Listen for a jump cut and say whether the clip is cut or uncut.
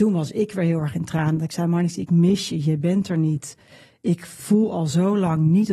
uncut